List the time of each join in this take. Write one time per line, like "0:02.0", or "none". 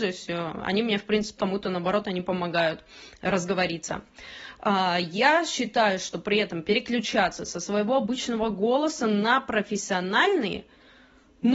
0:01.4